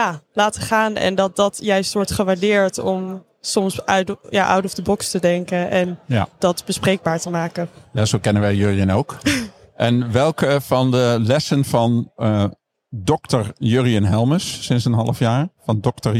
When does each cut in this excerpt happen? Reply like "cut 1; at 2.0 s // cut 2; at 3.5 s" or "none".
none